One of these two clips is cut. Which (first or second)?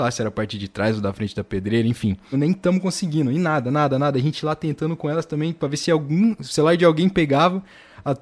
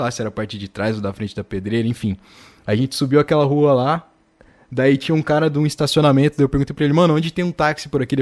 first